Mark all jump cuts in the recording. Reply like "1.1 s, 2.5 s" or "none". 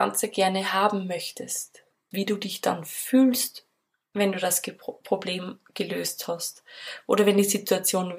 2.1 s